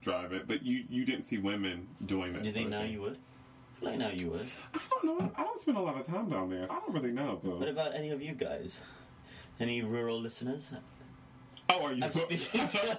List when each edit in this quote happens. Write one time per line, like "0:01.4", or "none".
0:06.7

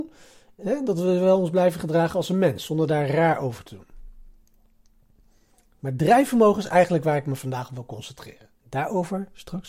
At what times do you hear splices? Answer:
0:08.6

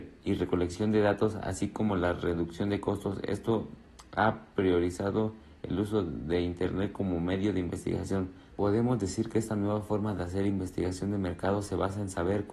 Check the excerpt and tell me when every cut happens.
0:08.5

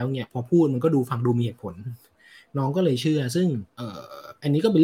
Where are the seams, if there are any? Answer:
0:03.7

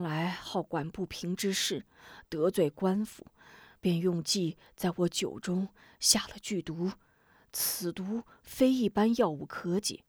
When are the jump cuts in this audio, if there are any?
0:03.8

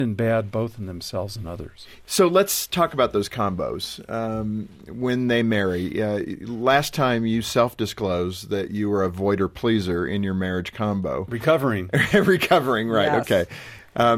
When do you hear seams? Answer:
none

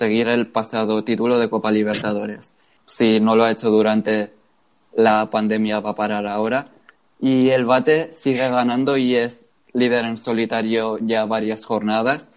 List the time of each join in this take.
0:02.8

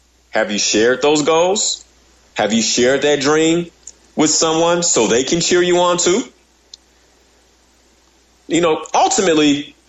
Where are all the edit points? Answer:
none

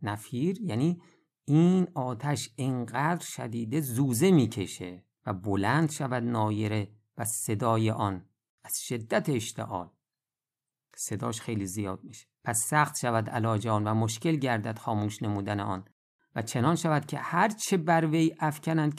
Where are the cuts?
0:05.1
0:12.3

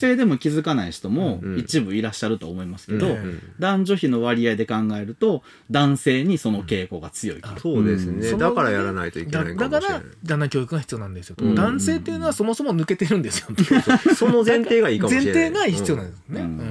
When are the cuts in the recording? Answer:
0:07.6

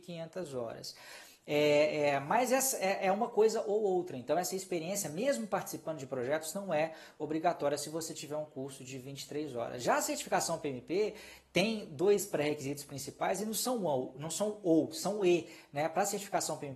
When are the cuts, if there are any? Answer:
none

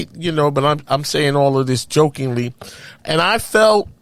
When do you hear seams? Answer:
0:03.0

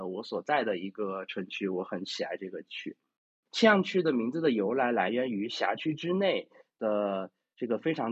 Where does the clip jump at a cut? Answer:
none

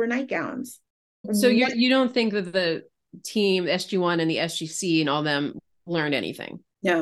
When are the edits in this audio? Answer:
none

